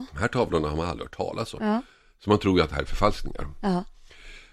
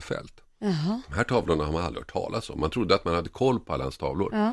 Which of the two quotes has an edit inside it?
first; 1 cut; at 1.6 s

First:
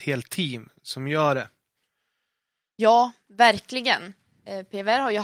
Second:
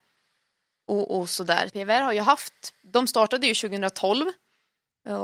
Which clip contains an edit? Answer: second; 1 cut; at 1.7 s

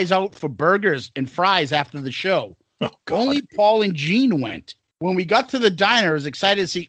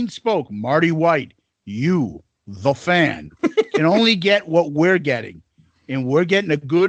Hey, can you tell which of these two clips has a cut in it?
first; 1 cut; at 4.9 s

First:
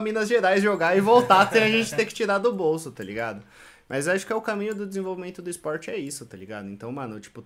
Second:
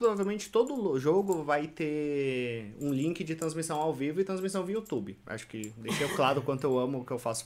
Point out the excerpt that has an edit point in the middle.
second; 1 cut; at 5.2 s

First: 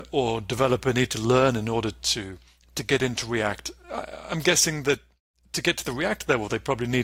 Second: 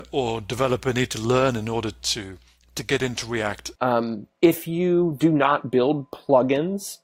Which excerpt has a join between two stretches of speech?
second; 1 cut; at 3.8 s

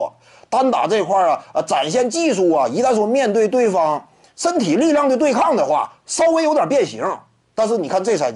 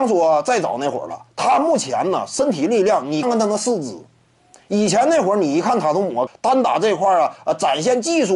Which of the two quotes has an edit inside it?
second; 2 cuts; at 3.2 s, 6.3 s

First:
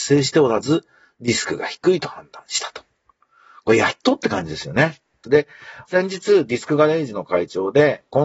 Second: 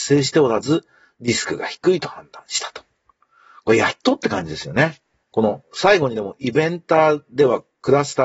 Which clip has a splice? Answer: first; 1 cut; at 5.2 s

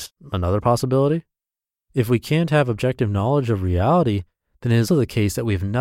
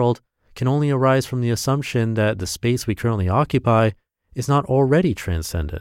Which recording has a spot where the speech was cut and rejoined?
first; 1 cut; at 4.9 s

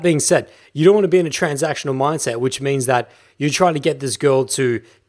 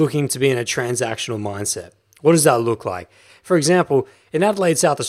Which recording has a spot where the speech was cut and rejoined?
second; 1 cut; at 3.3 s

